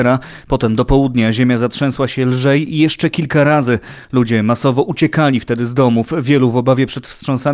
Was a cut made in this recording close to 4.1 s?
no; 0 cuts

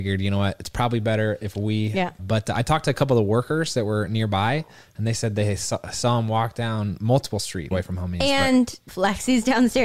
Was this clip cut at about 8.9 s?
yes; 3 cuts; at 2.2 s, 7.7 s, 8.9 s

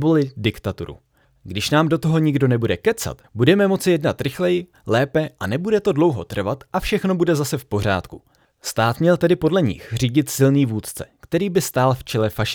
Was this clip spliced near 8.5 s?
no; 1 cut; at 3.2 s

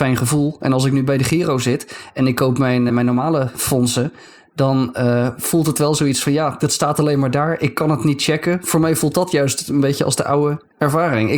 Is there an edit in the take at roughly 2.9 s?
yes; 1 cut; at 2.9 s

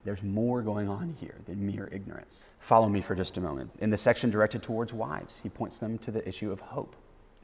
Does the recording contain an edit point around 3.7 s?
yes; 2 cuts; at 2.4 s, 3.7 s

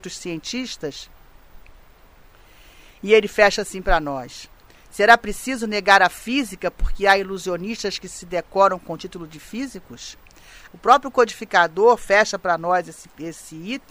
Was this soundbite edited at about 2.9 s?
no; 1 cut; at 10.7 s

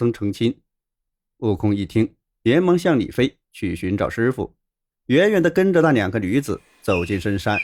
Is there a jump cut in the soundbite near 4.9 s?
yes; 1 cut; at 4.9 s

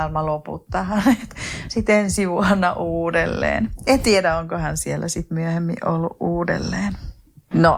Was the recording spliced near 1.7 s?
no; 0 cuts

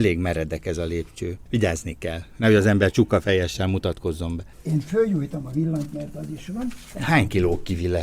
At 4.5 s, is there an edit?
yes; 1 cut; at 4.5 s

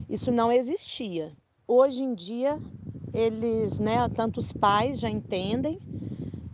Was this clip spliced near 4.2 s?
no; 1 cut; at 1.6 s

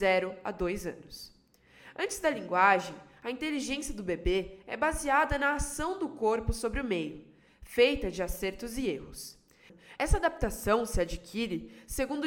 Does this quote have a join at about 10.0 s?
yes; 1 cut; at 10.0 s

